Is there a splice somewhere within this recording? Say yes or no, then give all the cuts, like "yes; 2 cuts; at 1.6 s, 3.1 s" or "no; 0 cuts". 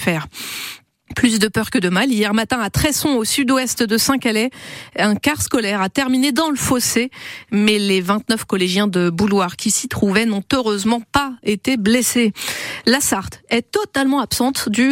no; 0 cuts